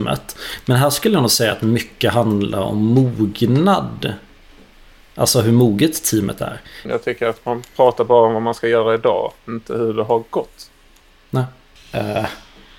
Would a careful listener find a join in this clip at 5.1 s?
no; 2 cuts; at 6.9 s, 11.8 s

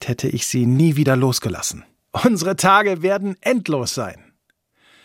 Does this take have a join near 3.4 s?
no; 1 cut; at 2.1 s

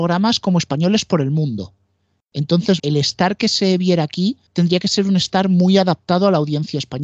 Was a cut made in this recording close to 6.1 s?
no; 2 cuts; at 2.8 s, 4.5 s

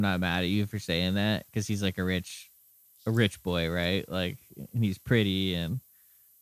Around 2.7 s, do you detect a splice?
no; 0 cuts

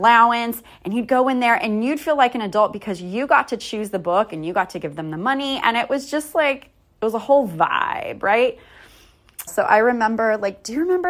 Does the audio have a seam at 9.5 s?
yes; 1 cut; at 9.5 s

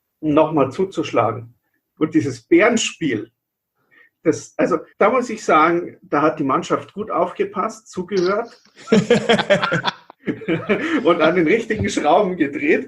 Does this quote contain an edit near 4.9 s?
yes; 2 cuts; at 2.0 s, 4.9 s

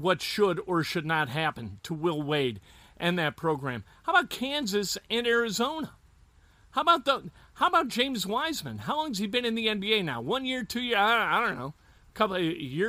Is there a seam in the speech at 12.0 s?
no; 0 cuts

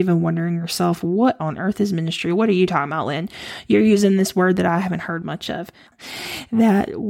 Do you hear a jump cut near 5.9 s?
yes; 1 cut; at 5.9 s

